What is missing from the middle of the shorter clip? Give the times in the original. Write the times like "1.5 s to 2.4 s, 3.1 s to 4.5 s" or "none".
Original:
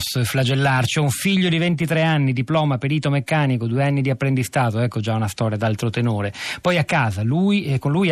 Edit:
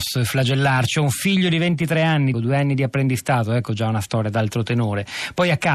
2.3 s to 3.6 s